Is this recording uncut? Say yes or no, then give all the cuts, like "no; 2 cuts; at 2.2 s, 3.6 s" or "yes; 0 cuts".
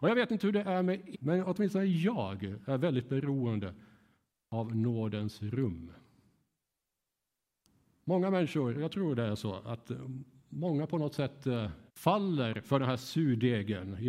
no; 3 cuts; at 1.1 s, 8.7 s, 11.9 s